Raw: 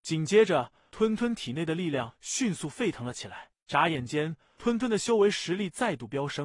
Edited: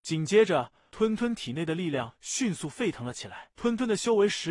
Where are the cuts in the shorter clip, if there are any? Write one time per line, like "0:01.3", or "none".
0:03.6

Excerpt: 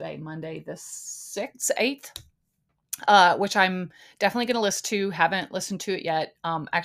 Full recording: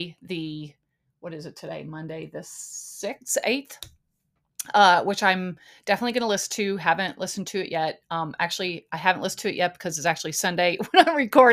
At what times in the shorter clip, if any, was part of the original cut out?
none

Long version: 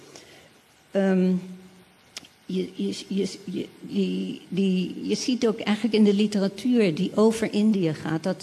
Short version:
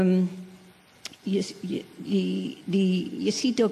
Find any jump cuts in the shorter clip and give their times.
0:01.2

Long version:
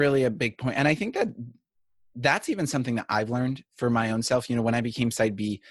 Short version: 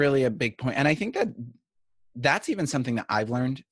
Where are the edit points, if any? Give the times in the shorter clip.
none

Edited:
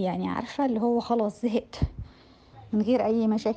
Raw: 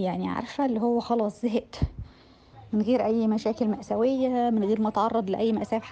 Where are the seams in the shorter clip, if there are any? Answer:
none

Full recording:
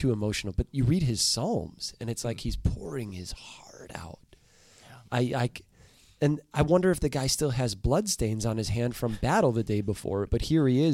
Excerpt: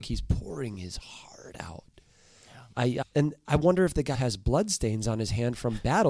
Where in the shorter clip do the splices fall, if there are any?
0:03.0
0:04.1

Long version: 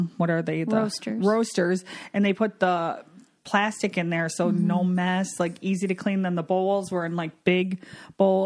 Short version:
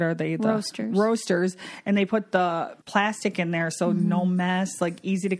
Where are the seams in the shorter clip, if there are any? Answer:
0:02.8

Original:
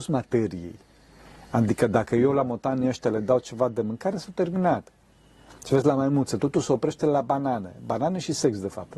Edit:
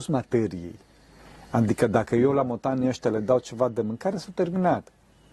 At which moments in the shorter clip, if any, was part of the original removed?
none

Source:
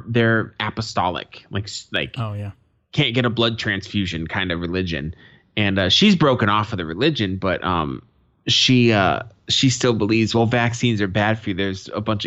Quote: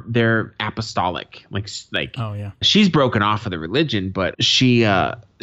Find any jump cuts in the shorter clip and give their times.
0:02.6
0:04.3

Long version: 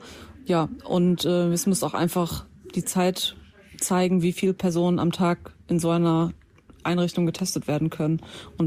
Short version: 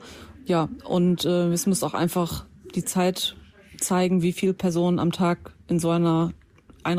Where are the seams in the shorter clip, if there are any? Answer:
none

